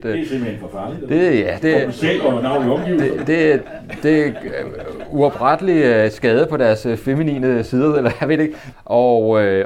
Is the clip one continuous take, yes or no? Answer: no